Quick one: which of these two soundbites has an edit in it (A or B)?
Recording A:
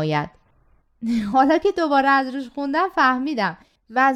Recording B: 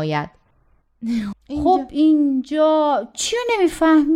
B